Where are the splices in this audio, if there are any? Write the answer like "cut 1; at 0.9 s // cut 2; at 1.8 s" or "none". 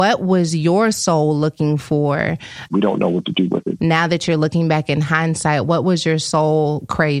cut 1; at 2.7 s // cut 2; at 3.8 s